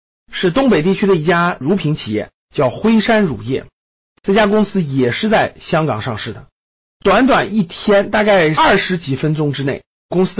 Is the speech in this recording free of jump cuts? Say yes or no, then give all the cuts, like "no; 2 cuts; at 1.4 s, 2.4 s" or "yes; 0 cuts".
yes; 0 cuts